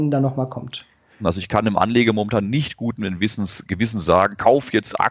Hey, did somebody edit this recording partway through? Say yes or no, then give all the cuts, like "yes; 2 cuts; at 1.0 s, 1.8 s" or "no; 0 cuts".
yes; 1 cut; at 1.2 s